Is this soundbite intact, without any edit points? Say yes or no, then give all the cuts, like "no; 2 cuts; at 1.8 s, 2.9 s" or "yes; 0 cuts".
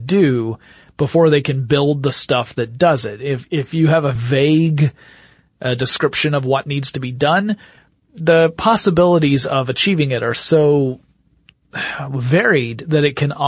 no; 1 cut; at 4.2 s